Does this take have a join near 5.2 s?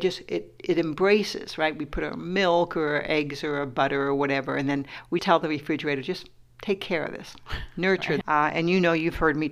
yes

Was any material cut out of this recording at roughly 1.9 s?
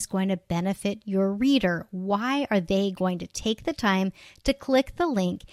no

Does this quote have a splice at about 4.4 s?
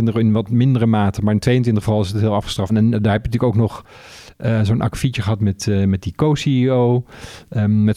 no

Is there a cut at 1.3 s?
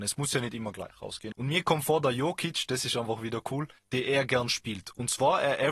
yes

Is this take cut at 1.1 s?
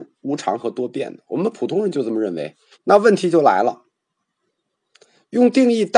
no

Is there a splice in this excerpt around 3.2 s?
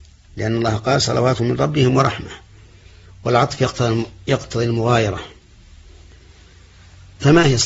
no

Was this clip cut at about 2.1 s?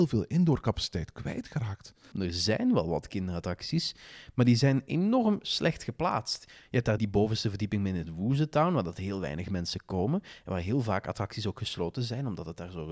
yes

